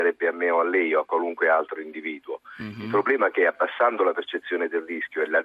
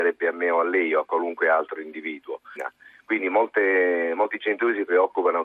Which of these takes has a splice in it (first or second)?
second